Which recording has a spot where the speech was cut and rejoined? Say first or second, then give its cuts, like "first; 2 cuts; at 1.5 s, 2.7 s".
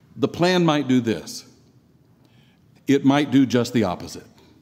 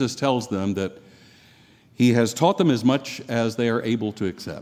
first; 1 cut; at 2.8 s